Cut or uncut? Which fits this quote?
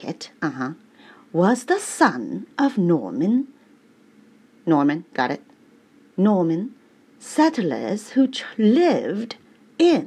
uncut